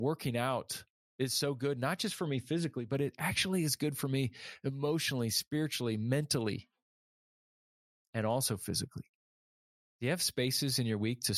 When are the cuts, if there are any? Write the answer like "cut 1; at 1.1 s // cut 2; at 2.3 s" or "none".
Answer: none